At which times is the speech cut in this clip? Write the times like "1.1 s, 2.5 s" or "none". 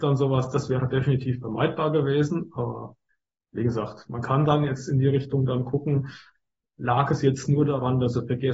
none